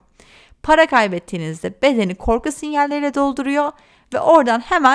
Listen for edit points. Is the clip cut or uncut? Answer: uncut